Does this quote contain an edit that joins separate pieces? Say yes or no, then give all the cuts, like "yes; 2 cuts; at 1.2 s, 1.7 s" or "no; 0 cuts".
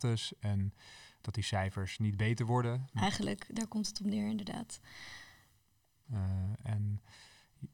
yes; 2 cuts; at 2.9 s, 6.0 s